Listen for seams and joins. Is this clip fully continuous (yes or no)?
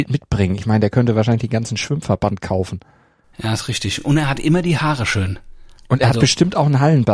yes